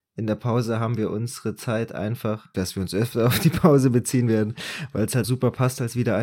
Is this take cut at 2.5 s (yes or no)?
yes